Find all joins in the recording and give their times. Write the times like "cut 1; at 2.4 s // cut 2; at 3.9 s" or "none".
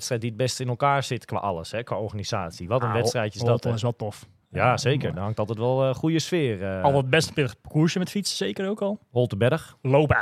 none